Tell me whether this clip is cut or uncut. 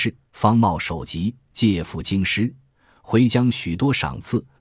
uncut